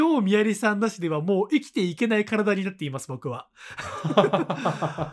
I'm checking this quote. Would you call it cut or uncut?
uncut